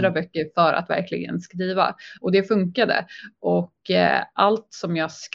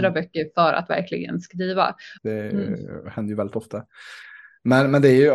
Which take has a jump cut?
second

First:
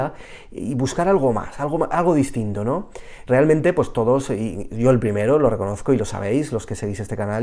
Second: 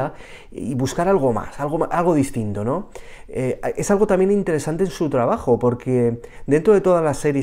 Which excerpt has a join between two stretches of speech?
first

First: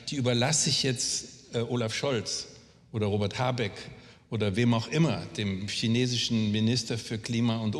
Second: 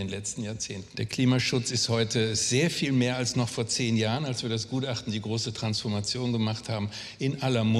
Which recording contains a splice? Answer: second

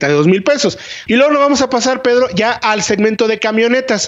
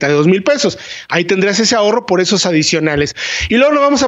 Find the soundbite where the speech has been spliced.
first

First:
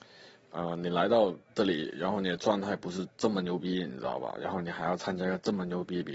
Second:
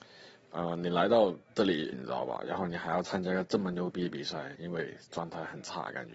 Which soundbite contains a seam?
second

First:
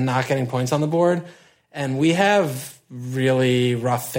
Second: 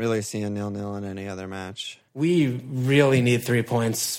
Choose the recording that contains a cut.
second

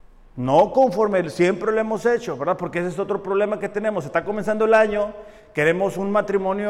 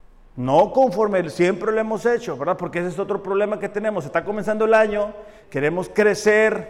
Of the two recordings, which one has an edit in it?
second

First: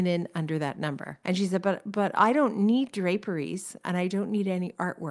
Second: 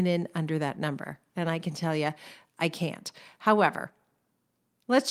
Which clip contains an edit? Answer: first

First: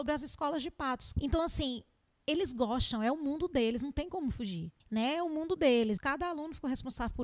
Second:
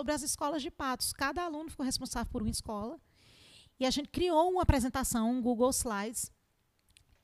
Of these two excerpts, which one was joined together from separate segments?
first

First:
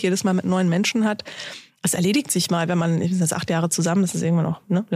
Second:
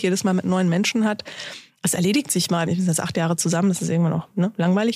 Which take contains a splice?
second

